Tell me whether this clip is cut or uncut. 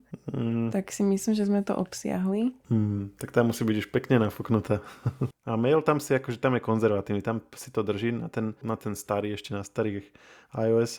cut